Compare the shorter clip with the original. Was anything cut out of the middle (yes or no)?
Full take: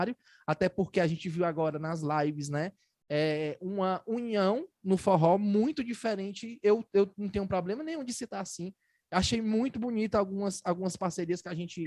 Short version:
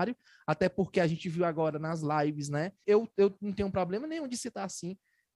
yes